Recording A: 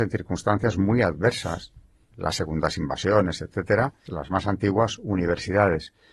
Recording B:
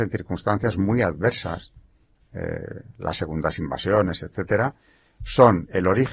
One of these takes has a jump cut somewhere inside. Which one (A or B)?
A